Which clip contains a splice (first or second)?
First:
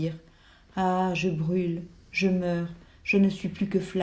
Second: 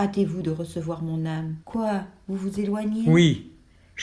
second